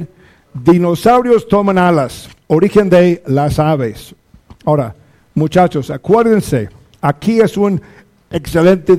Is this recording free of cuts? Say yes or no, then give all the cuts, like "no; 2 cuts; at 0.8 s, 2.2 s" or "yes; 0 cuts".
yes; 0 cuts